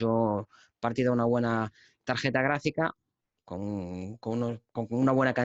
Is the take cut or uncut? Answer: uncut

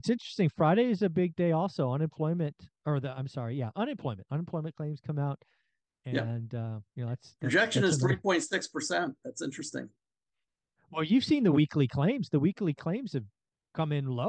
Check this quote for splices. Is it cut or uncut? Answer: cut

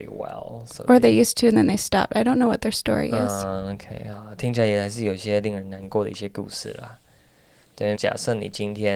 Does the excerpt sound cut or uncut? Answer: cut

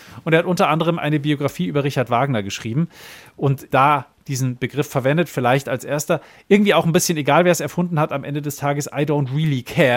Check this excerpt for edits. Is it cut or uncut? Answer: cut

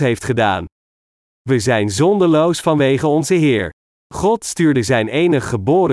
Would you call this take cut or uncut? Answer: cut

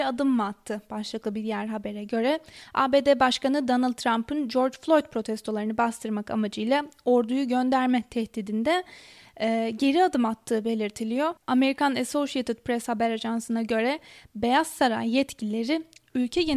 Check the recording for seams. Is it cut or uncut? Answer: cut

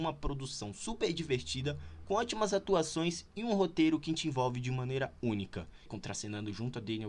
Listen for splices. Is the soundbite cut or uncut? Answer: cut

